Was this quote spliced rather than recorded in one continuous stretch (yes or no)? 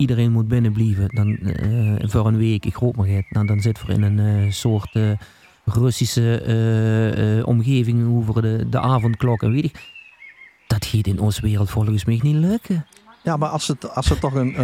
yes